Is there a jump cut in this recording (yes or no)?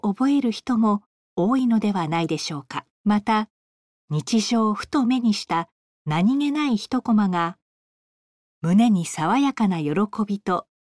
yes